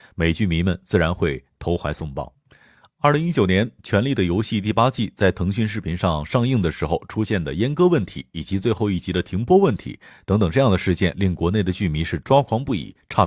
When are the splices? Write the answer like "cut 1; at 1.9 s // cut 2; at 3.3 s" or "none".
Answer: none